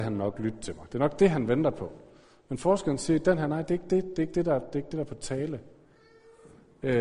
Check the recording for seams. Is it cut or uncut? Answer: uncut